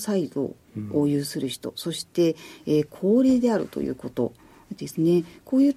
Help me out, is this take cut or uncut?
uncut